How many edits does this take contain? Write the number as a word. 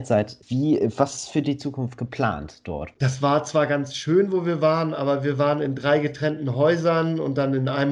one